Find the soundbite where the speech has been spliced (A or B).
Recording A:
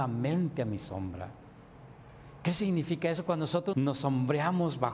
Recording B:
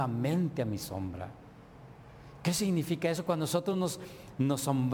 A